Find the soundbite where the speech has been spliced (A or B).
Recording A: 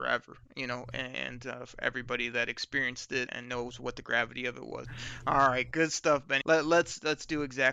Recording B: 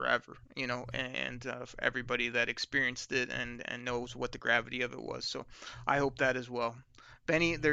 A